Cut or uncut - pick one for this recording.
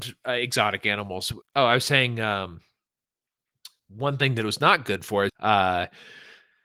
cut